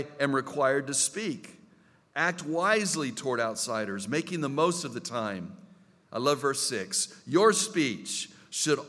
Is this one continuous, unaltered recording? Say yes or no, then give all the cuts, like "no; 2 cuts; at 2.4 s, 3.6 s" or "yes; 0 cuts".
yes; 0 cuts